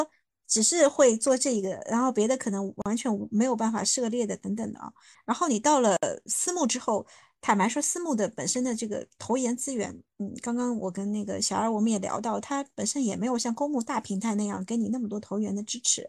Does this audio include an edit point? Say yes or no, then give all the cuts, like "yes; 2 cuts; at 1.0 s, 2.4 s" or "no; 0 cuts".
yes; 1 cut; at 5.1 s